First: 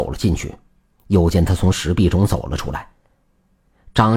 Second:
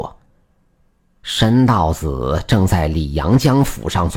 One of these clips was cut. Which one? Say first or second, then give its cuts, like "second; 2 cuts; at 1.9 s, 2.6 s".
first; 1 cut; at 0.9 s